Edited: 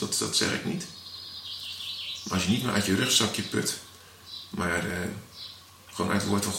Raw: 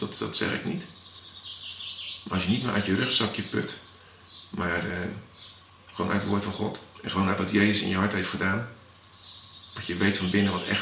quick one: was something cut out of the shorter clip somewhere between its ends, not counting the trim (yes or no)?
no